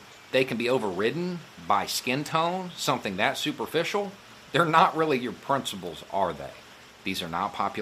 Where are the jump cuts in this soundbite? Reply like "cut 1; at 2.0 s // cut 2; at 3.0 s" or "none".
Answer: cut 1; at 6.9 s